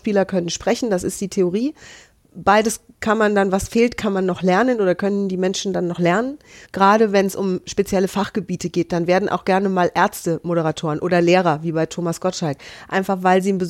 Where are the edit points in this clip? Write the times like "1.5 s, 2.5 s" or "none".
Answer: 6.6 s